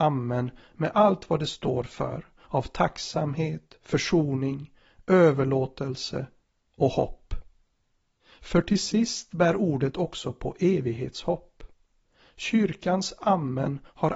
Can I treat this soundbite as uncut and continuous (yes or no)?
yes